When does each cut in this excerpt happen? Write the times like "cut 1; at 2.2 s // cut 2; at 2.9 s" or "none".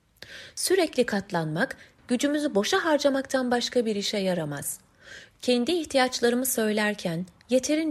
cut 1; at 2.0 s // cut 2; at 5.3 s